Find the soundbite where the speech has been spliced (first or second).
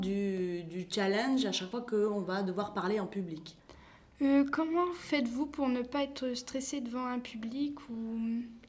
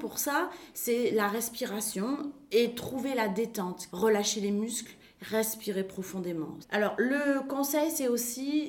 second